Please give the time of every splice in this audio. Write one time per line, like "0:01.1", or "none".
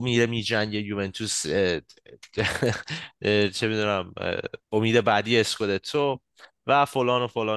0:04.6

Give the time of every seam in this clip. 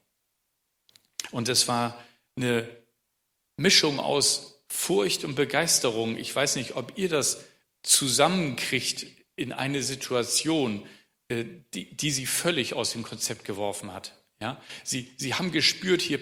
none

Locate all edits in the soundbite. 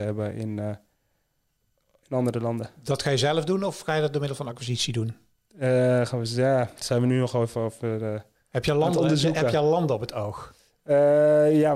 none

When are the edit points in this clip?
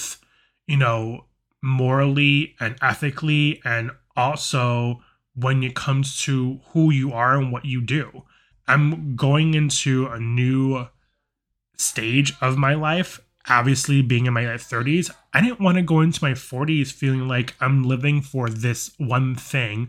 0:08.5

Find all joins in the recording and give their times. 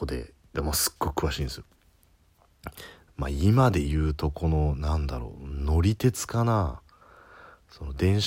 0:03.1

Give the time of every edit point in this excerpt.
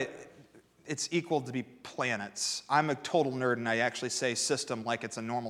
none

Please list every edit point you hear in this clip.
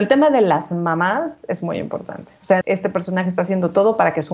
0:02.6

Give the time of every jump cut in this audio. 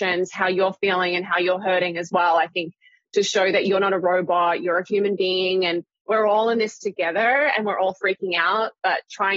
none

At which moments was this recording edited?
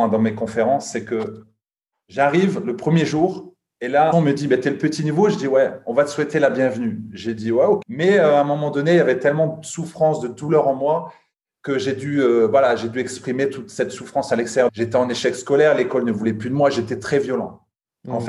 0:04.1
0:07.8
0:14.7

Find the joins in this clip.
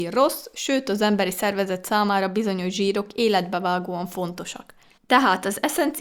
0:05.0

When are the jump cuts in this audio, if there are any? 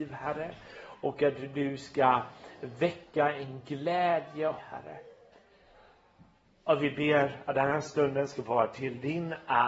0:04.6

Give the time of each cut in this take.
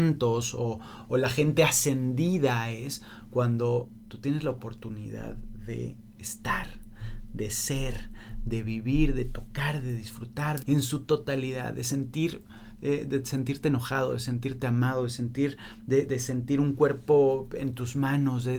0:10.6
0:16.1

